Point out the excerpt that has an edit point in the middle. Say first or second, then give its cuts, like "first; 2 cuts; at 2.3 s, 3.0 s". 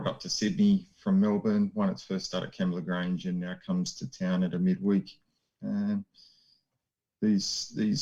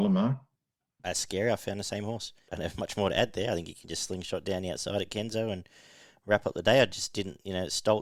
second; 2 cuts; at 1.0 s, 2.5 s